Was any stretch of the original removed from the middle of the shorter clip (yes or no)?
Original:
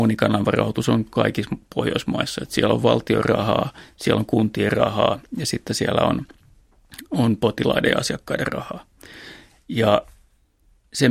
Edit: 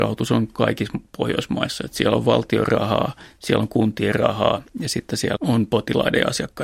yes